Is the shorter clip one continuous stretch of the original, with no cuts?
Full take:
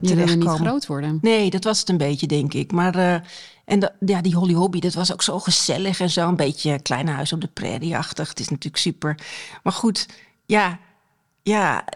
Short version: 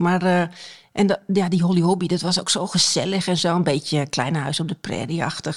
yes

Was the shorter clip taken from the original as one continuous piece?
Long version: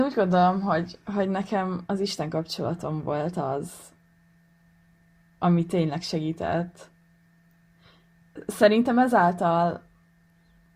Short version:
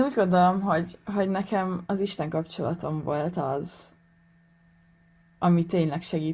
yes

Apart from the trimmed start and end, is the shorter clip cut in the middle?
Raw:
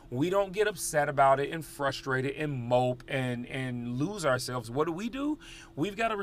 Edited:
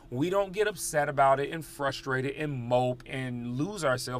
yes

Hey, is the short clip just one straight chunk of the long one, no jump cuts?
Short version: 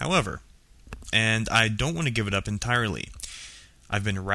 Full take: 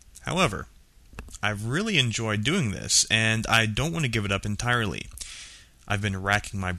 no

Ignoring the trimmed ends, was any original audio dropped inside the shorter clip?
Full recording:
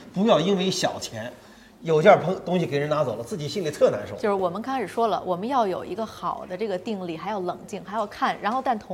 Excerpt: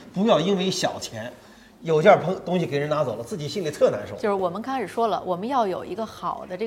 no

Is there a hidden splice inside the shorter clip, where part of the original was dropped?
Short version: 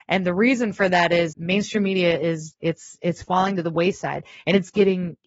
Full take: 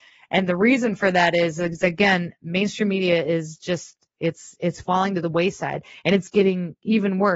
yes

